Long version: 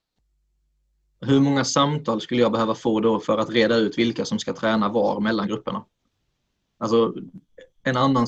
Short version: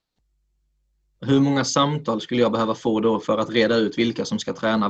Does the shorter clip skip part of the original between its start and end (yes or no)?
no